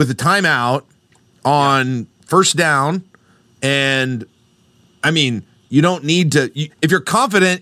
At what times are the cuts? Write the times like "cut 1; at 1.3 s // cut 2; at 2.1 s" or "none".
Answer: cut 1; at 6.7 s